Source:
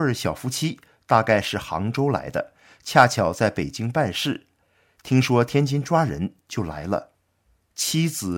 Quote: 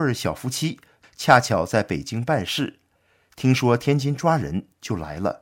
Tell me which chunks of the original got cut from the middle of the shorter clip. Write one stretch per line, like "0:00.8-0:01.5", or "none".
0:01.0-0:02.7